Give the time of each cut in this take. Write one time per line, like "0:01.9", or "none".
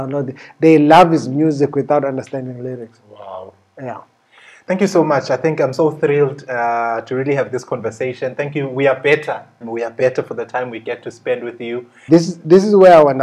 0:09.6
0:12.1

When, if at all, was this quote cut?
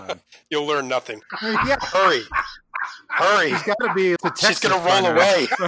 0:01.3
0:04.2

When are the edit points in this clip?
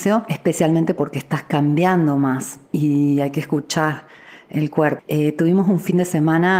0:05.0

